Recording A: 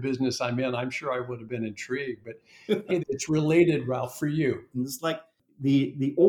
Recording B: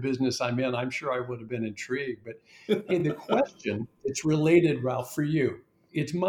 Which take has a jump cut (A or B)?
A